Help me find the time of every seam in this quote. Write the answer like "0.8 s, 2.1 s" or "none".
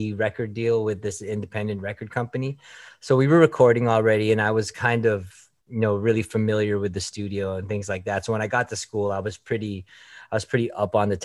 none